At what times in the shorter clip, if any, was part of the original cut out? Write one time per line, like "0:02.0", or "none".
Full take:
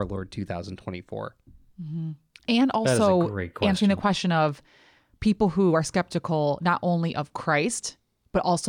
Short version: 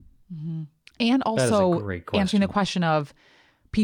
none